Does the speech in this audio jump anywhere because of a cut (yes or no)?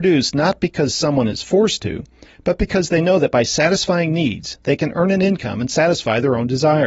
no